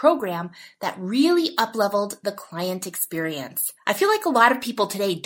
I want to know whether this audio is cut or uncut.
cut